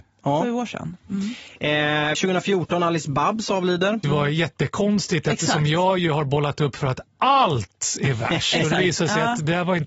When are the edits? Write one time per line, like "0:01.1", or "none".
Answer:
0:02.1
0:04.0